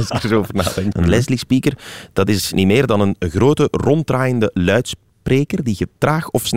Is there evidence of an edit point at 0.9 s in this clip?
yes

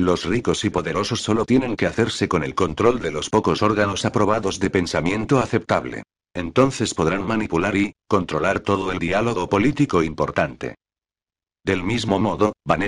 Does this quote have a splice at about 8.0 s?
yes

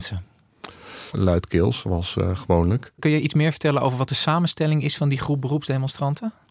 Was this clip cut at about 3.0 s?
no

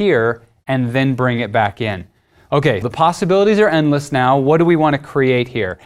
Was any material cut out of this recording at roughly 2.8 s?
yes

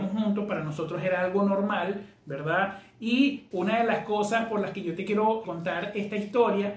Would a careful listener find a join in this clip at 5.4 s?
yes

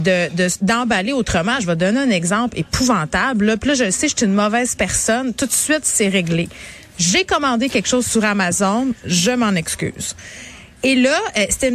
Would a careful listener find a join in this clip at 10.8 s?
no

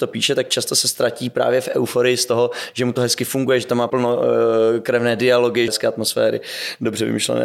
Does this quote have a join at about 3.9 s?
yes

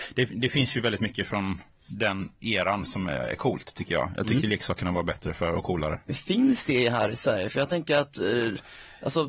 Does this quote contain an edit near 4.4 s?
no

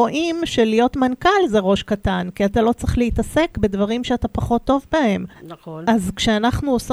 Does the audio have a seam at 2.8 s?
no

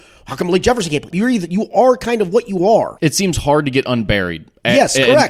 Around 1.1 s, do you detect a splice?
yes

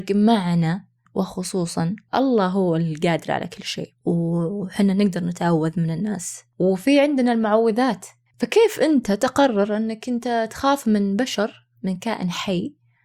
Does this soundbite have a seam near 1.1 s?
yes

